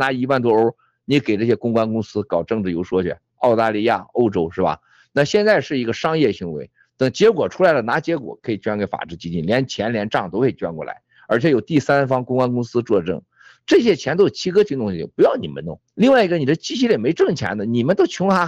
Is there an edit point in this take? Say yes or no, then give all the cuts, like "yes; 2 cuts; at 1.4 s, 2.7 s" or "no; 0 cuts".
yes; 1 cut; at 15.9 s